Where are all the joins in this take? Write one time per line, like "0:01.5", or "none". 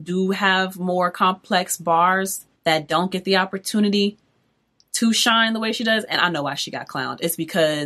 0:02.6